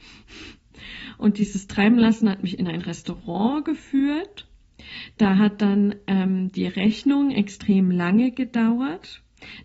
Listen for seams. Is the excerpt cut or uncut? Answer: uncut